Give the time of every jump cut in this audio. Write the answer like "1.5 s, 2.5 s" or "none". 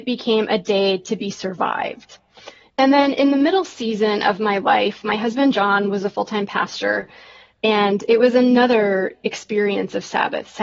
2.6 s